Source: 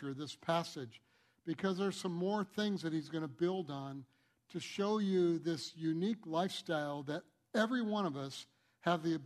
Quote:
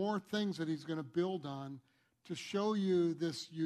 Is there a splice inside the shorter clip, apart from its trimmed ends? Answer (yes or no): no